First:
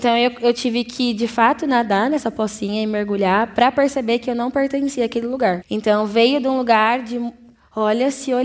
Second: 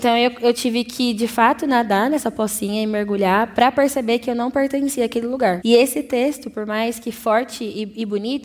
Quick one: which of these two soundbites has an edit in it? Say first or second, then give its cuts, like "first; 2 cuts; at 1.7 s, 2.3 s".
first; 1 cut; at 5.6 s